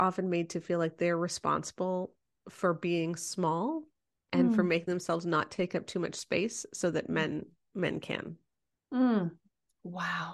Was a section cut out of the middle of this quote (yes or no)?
no